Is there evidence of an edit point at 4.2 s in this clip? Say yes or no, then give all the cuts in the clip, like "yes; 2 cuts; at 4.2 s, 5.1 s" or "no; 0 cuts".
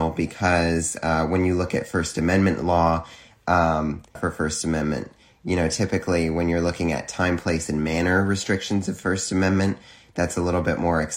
yes; 1 cut; at 4.2 s